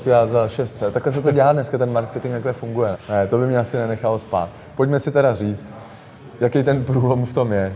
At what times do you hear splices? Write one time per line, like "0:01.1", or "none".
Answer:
0:02.9